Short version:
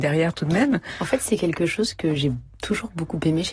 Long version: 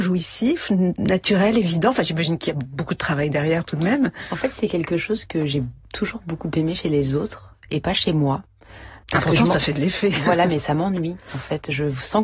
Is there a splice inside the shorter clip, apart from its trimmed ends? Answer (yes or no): no